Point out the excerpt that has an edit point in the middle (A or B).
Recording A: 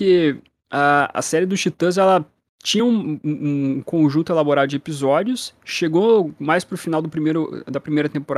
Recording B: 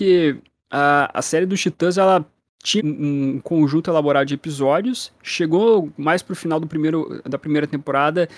B